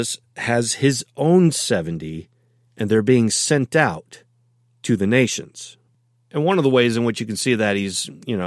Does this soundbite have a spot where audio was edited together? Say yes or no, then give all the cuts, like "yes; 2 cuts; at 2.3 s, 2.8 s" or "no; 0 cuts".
no; 0 cuts